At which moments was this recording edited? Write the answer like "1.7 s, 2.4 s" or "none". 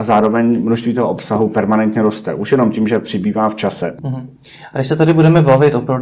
4.0 s